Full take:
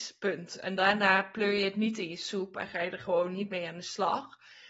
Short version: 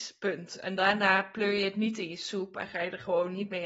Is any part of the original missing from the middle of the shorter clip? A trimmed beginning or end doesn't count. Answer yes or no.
no